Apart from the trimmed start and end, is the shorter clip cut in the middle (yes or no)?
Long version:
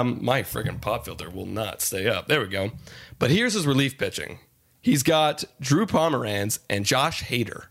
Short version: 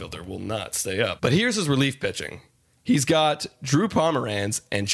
yes